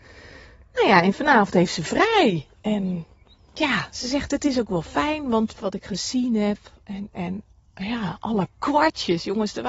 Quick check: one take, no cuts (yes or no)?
no